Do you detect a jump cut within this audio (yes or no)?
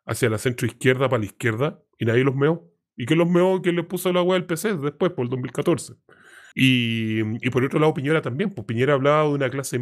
yes